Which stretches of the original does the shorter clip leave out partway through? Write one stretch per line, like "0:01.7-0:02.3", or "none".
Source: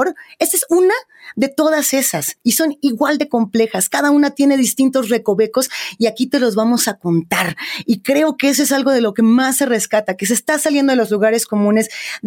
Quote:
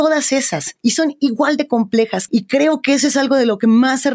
0:03.9-0:07.8